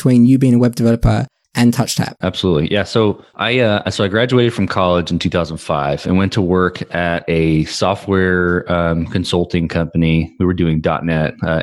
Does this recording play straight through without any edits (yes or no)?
no